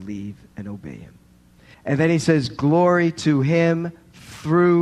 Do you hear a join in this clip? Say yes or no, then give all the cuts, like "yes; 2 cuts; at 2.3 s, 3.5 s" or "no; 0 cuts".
yes; 1 cut; at 1.7 s